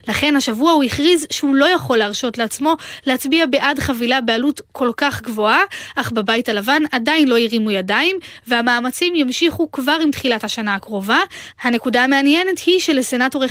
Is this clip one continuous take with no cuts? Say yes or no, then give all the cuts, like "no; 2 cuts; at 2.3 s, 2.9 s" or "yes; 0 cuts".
yes; 0 cuts